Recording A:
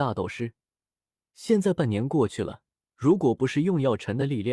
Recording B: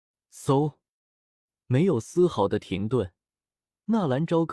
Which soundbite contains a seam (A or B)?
A